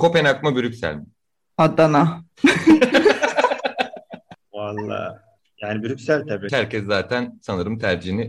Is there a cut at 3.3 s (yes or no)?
no